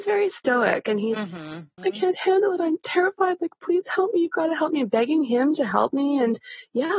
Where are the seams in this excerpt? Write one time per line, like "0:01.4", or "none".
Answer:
0:01.8